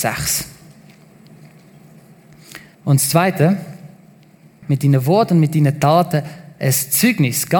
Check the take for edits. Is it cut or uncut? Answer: cut